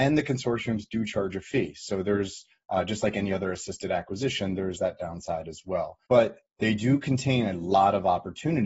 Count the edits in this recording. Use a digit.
1